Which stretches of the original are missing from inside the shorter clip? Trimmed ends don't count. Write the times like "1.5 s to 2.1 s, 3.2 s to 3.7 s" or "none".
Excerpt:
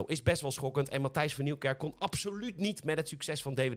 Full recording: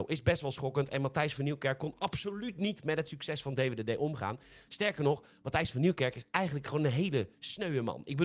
none